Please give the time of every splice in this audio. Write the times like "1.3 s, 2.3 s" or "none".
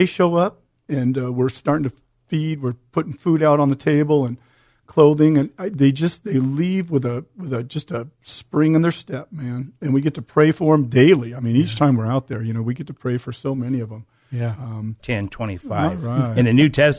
15.0 s

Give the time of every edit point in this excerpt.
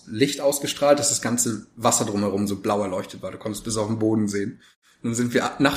none

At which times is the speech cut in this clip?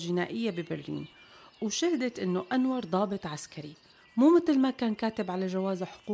none

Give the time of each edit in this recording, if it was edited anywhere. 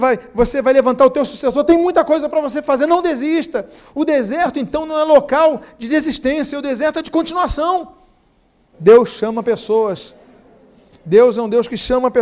8.7 s

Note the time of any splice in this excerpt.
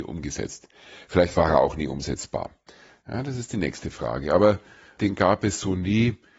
none

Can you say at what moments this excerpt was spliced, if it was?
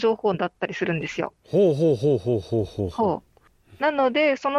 none

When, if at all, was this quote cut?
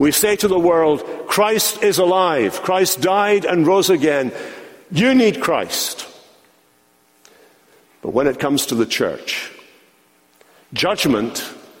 none

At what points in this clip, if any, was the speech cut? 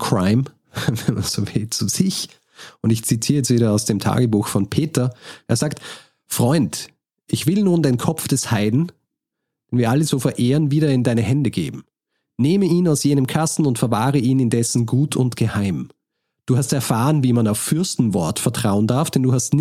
none

